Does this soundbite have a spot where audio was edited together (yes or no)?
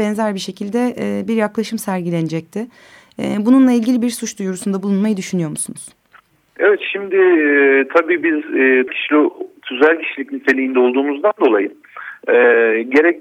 yes